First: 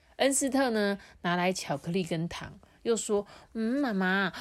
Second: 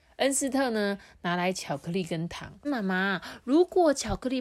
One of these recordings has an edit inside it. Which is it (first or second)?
second